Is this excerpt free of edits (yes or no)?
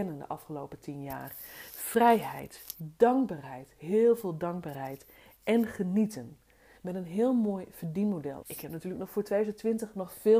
no